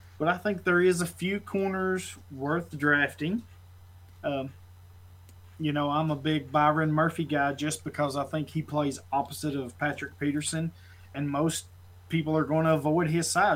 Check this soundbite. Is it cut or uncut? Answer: uncut